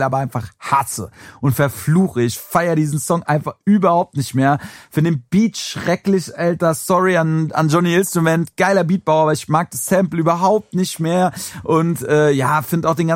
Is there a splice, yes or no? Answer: no